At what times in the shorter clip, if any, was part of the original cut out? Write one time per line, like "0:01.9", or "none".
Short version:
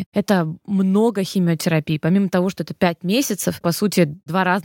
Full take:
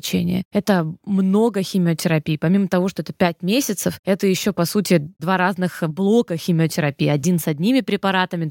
0:03.6